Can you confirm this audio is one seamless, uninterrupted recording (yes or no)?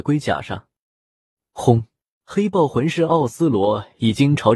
no